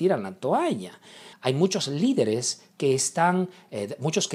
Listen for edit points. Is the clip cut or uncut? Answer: cut